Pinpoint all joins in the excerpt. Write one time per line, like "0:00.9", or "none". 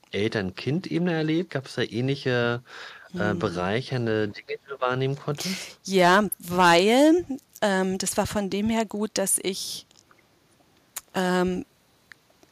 none